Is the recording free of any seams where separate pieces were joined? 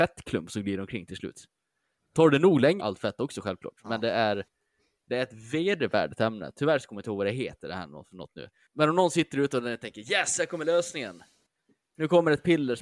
no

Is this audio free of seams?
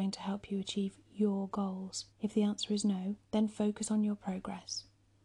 no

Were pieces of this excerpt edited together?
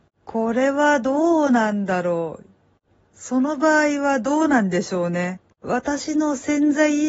yes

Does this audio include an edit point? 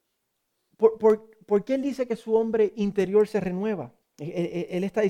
yes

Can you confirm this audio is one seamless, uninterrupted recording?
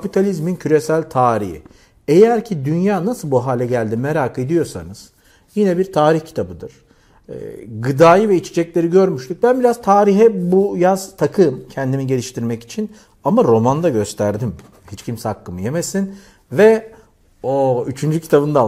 no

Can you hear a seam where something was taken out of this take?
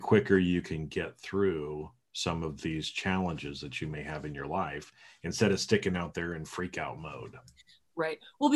no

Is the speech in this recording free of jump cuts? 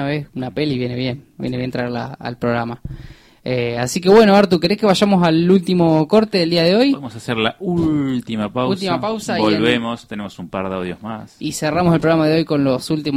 yes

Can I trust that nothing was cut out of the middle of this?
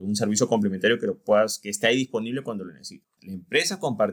no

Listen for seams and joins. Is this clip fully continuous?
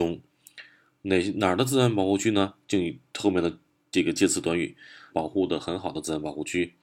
no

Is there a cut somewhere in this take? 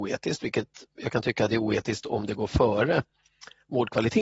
no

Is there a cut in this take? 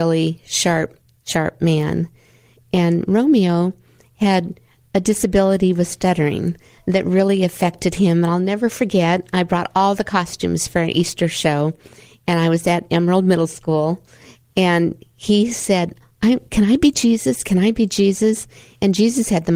no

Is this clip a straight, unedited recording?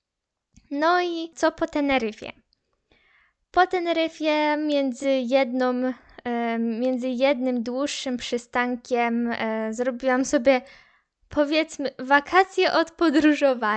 yes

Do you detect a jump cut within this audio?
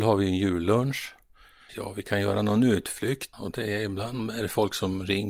yes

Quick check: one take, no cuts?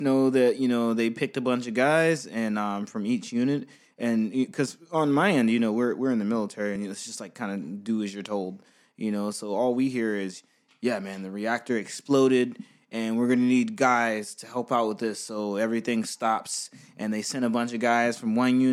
yes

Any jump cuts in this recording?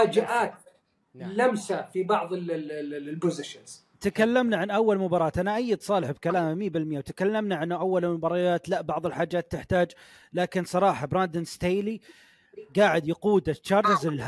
yes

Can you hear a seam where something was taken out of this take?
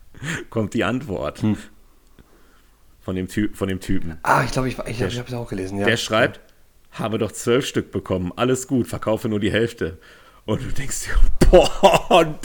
no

